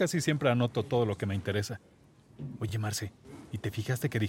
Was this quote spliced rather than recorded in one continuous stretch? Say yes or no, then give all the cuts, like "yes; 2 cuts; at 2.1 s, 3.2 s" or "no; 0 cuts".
no; 0 cuts